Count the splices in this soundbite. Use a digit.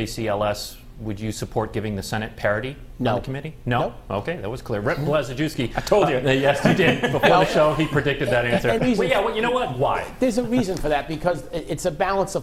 1